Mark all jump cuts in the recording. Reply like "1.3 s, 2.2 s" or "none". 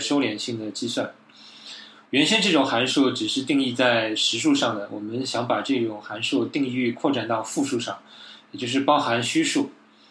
2.1 s

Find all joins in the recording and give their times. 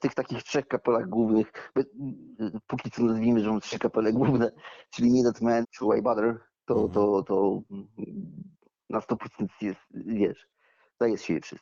5.6 s

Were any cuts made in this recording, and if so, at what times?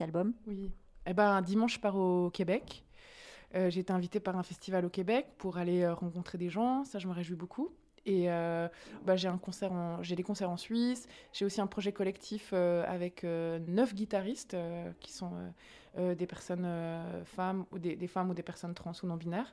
9.0 s

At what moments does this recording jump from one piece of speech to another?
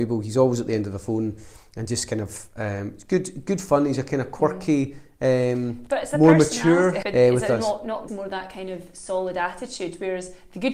7.0 s, 8.1 s

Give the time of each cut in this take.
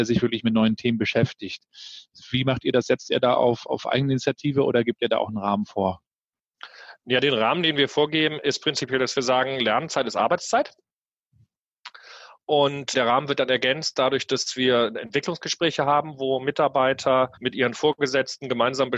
12.9 s, 17.4 s

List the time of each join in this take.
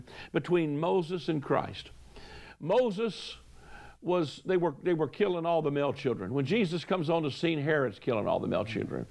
none

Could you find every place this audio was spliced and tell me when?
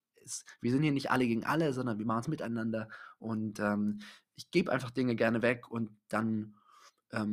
none

